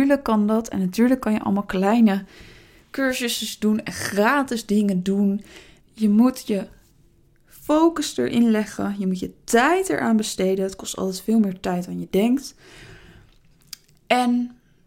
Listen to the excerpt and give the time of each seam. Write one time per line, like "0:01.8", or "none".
0:05.8